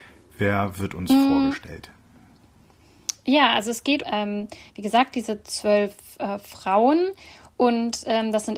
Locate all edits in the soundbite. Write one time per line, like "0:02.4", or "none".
0:04.0